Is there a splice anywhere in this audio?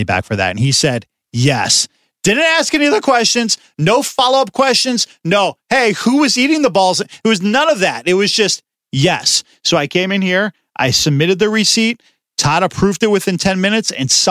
no; 0 cuts

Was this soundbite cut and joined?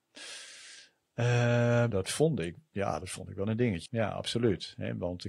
yes; 2 cuts; at 1.9 s, 3.9 s

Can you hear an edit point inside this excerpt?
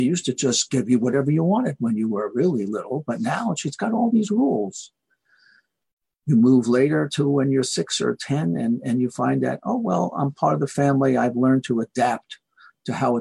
no; 0 cuts

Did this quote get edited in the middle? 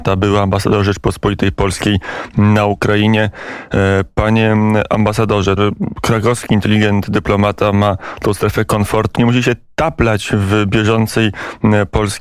yes; 2 cuts; at 5.6 s, 9.1 s

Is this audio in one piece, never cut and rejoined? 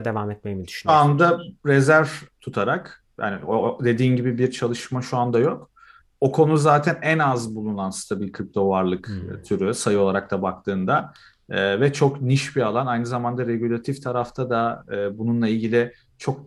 yes; 0 cuts

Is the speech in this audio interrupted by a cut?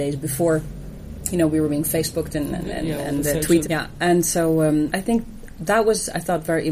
yes; 2 cuts; at 3.6 s, 4.9 s

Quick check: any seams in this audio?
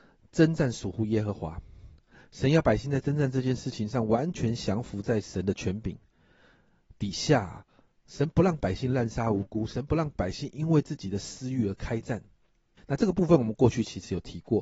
yes; 1 cut; at 12.8 s

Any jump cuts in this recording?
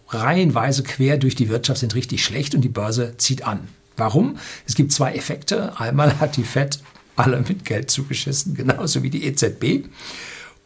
no; 0 cuts

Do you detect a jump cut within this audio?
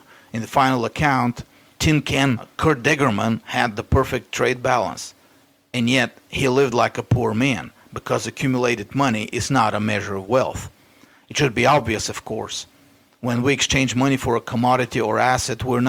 no; 0 cuts

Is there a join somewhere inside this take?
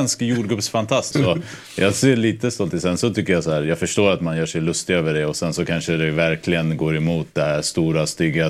yes; 1 cut; at 1.1 s

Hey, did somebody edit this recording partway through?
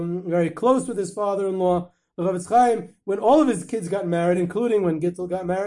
no; 0 cuts

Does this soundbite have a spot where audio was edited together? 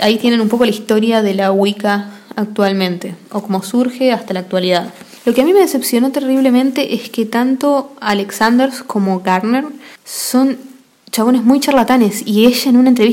no; 0 cuts

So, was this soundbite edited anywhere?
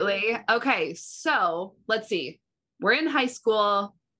no; 0 cuts

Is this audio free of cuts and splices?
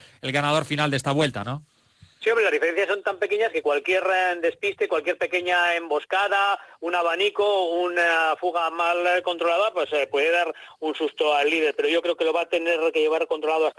yes; 0 cuts

